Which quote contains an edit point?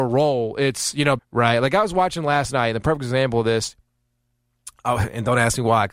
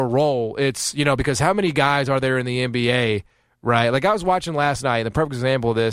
first; 1 cut; at 1.2 s

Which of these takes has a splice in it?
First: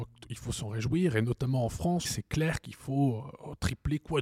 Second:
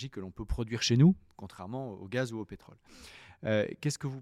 first; 1 cut; at 2.0 s

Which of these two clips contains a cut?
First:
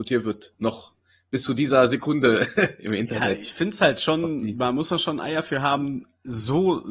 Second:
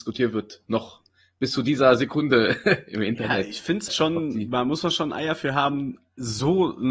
second; 1 cut; at 3.9 s

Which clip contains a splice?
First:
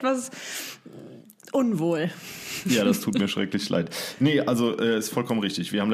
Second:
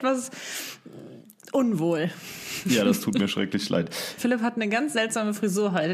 second; 1 cut; at 4.2 s

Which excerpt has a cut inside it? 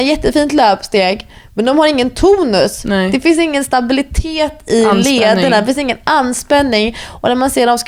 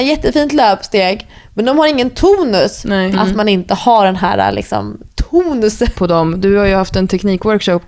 second; 2 cuts; at 3.1 s, 6.0 s

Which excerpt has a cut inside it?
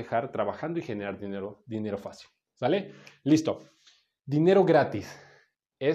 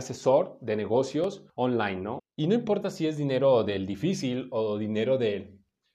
second; 1 cut; at 2.2 s

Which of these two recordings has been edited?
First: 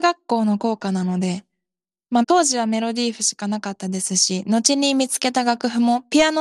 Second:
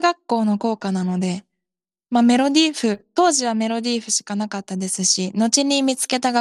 first; 1 cut; at 2.2 s

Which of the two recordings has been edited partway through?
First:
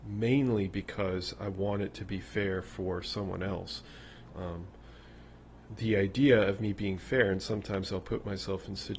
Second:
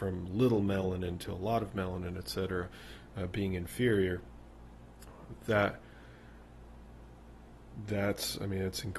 first; 2 cuts; at 4.3 s, 5.7 s

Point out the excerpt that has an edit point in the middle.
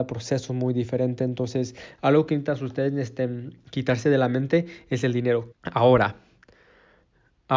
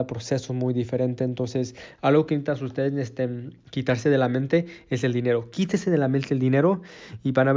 first; 1 cut; at 5.5 s

